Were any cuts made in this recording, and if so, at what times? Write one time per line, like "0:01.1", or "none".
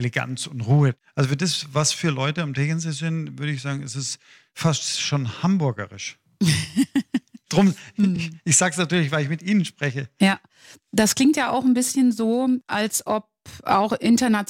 none